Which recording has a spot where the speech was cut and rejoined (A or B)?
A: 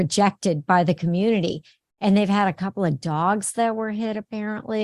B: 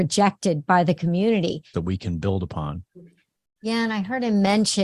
B